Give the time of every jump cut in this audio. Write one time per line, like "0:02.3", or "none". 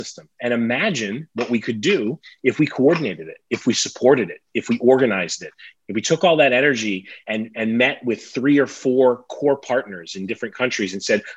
0:05.7